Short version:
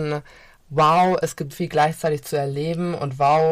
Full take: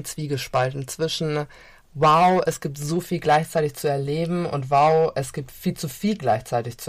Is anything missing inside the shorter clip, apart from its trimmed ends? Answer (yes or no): yes